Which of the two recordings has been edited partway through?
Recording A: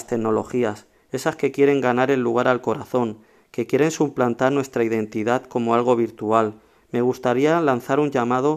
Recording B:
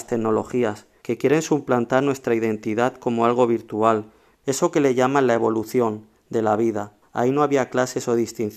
B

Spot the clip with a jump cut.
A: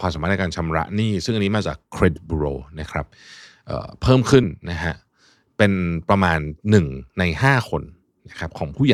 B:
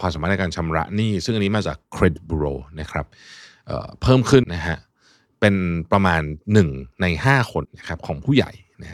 B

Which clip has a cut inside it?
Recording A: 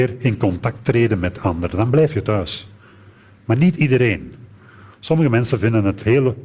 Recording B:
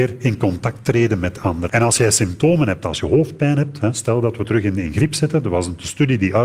B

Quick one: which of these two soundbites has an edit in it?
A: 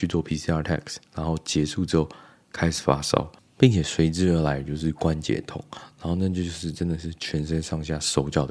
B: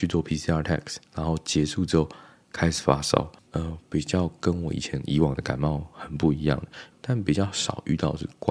B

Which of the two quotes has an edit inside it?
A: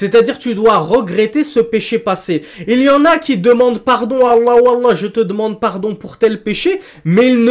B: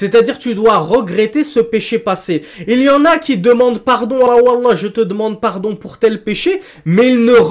B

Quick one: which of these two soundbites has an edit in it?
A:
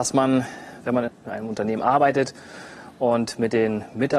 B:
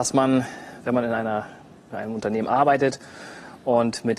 A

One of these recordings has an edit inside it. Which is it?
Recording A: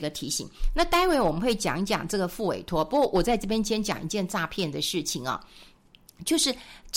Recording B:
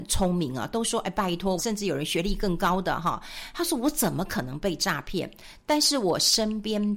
B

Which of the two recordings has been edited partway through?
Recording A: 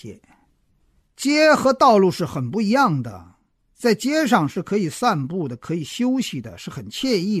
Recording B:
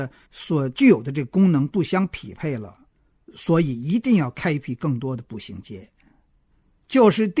A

